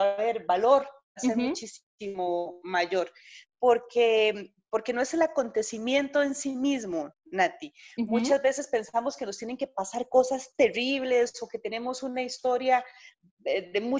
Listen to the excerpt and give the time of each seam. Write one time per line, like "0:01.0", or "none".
none

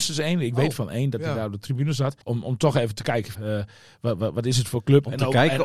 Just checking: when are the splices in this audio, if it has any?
0:02.2
0:03.3

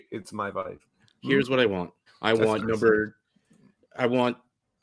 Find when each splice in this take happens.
0:02.1

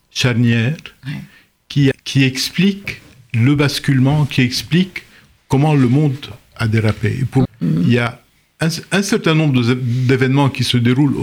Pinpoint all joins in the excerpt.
0:01.9
0:07.4

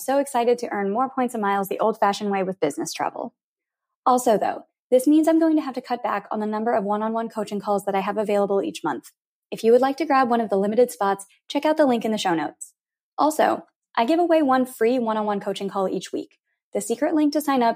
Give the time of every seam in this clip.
none

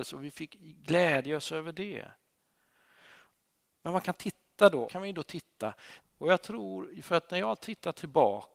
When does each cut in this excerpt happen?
0:04.9
0:06.0

